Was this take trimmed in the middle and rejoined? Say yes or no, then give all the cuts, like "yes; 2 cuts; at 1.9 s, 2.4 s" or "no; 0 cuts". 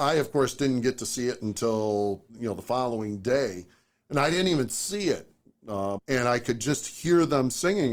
yes; 2 cuts; at 2.3 s, 6.0 s